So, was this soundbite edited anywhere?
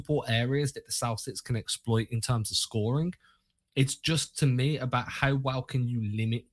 no; 0 cuts

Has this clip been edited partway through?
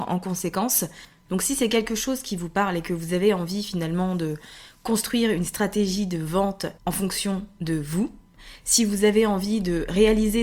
yes; 2 cuts; at 1.3 s, 6.8 s

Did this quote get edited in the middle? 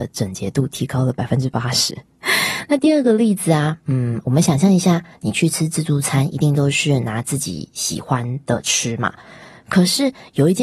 no; 0 cuts

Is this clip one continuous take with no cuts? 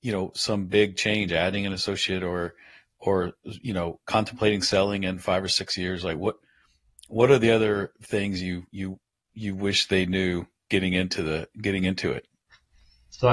yes; 0 cuts

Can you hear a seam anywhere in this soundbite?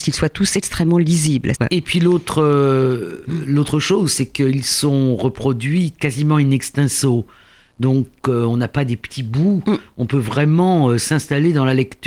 yes; 1 cut; at 1.5 s

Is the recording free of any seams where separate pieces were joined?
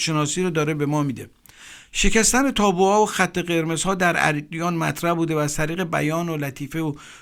yes; 0 cuts

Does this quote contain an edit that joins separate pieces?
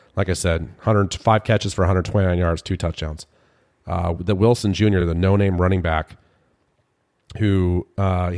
no; 0 cuts

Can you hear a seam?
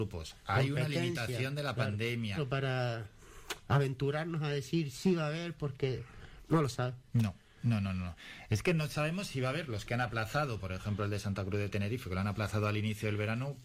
yes; 1 cut; at 2.4 s

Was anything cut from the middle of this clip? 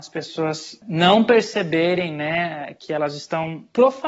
no; 0 cuts

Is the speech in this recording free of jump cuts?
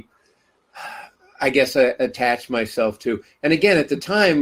yes; 0 cuts

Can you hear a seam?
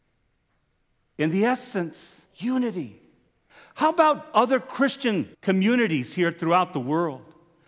yes; 2 cuts; at 2.3 s, 5.3 s

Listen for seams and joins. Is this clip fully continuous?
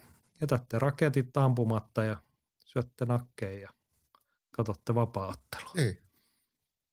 yes; 0 cuts

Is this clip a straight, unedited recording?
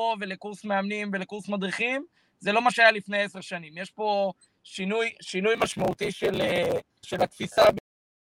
no; 1 cut; at 7.0 s

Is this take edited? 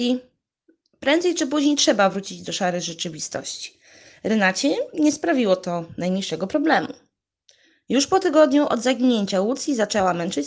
no; 0 cuts

